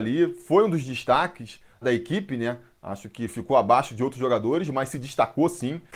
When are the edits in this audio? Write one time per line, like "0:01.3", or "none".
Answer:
0:01.8

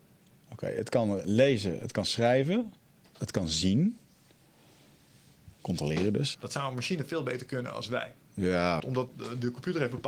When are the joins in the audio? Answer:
0:06.3
0:08.8

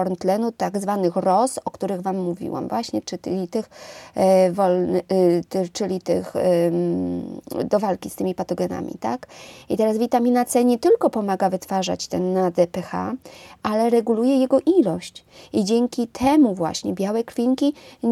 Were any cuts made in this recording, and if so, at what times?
none

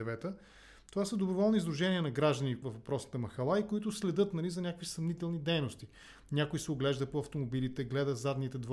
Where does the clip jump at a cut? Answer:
0:02.6

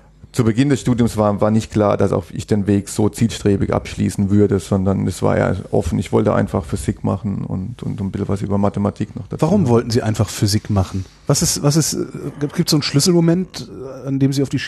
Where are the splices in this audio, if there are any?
0:11.2

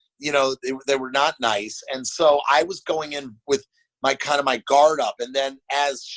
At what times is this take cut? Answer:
none

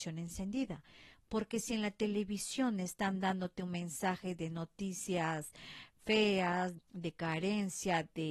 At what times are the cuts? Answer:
0:06.8

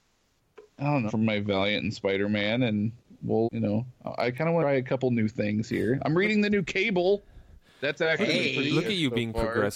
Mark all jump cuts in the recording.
0:01.1
0:03.4

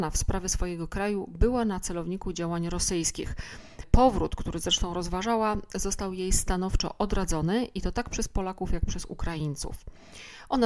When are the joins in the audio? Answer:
none

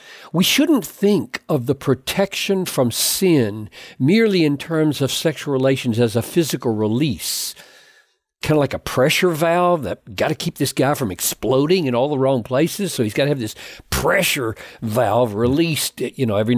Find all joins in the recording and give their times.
none

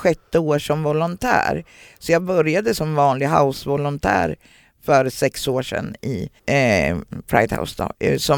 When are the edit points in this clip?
0:06.4

